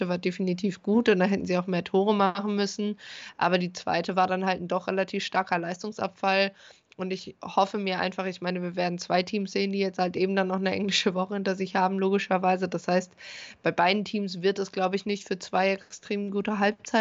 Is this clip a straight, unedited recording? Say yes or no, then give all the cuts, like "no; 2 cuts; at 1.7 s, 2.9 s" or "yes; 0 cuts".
yes; 0 cuts